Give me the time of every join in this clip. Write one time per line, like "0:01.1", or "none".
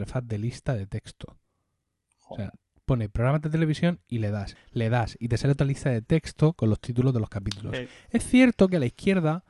0:04.6